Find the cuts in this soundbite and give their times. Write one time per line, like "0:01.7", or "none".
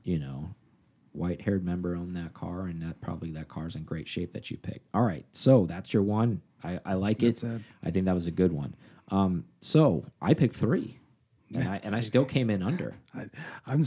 none